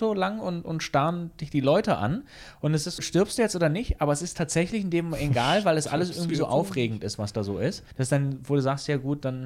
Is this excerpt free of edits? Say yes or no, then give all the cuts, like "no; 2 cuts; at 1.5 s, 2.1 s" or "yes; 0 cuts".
no; 2 cuts; at 3.0 s, 7.9 s